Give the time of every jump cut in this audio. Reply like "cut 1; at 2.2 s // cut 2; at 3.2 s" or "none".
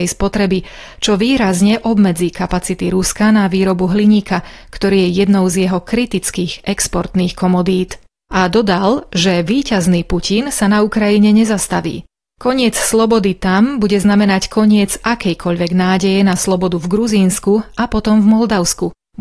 cut 1; at 8.3 s

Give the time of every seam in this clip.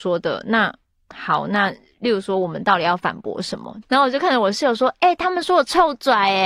cut 1; at 3.8 s

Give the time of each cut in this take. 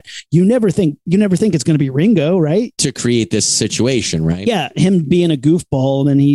cut 1; at 2.7 s

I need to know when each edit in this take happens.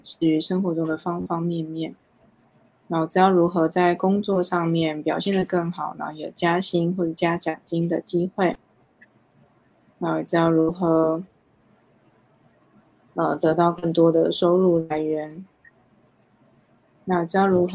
none

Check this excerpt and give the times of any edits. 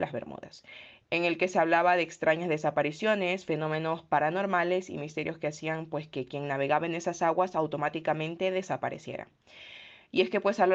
none

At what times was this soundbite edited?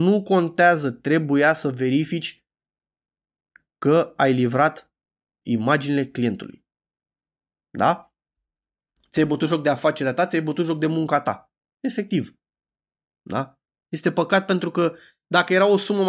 cut 1; at 5.4 s

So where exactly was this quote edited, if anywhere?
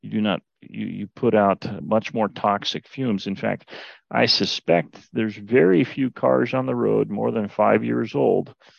cut 1; at 1.8 s

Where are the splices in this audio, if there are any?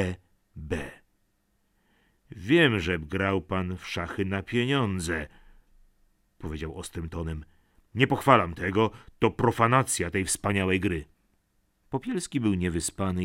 none

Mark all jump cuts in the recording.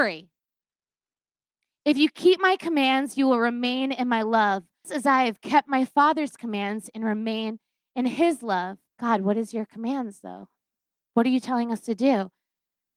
cut 1; at 4.8 s // cut 2; at 8.9 s

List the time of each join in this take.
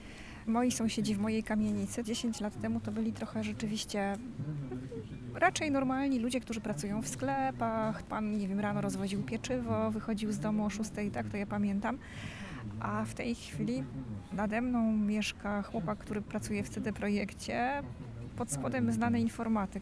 cut 1; at 18.3 s

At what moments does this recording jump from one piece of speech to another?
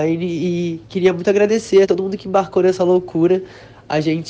cut 1; at 1.8 s

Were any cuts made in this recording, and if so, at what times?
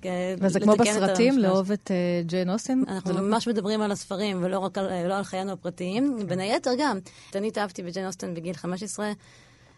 cut 1; at 2.8 s // cut 2; at 7.3 s

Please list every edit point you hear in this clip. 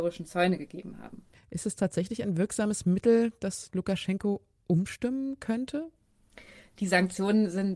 cut 1; at 1.3 s

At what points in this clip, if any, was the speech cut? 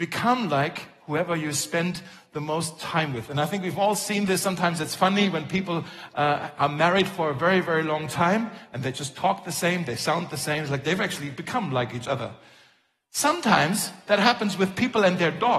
none

